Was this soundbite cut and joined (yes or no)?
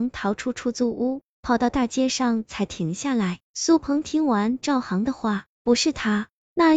yes